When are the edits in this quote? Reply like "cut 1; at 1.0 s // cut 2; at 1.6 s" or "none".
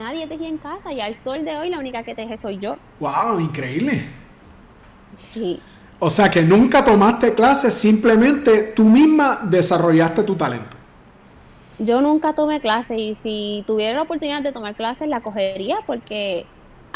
none